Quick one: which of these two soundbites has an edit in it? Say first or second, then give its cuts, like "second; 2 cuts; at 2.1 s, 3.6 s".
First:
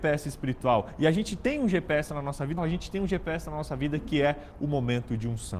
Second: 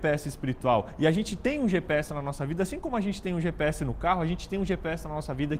first; 1 cut; at 2.6 s